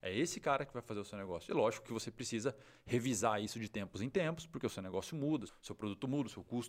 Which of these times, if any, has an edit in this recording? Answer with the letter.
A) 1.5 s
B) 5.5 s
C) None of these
B